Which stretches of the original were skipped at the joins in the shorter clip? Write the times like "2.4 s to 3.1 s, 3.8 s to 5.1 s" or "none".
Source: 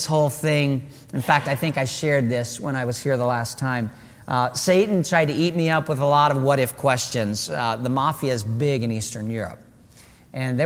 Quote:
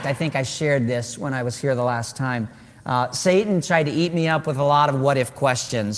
none